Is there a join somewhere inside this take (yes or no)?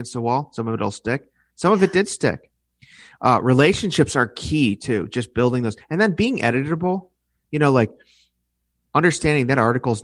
no